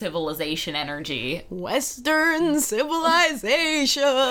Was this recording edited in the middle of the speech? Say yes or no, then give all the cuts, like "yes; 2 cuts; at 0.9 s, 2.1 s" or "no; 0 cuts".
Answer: no; 0 cuts